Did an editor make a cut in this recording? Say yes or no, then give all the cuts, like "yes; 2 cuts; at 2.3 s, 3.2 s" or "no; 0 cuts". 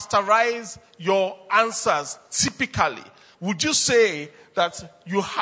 no; 0 cuts